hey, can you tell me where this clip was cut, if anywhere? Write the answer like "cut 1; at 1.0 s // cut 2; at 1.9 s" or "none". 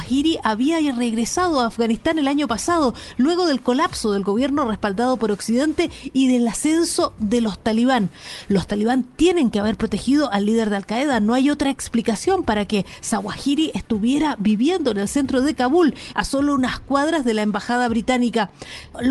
cut 1; at 16.1 s